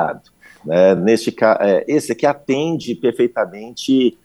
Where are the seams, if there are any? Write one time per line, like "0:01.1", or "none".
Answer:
none